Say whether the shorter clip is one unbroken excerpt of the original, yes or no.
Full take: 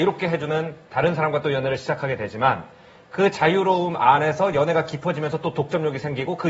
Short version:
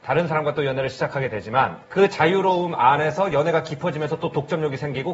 no